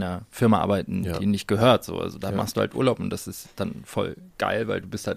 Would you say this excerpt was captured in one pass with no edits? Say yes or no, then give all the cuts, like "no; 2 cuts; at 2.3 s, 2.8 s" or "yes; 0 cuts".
yes; 0 cuts